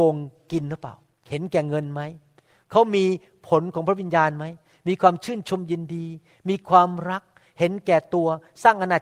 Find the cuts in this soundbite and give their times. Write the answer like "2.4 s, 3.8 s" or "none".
none